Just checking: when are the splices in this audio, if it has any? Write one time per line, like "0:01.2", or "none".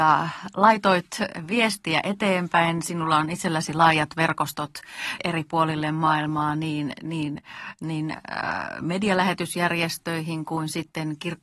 0:05.2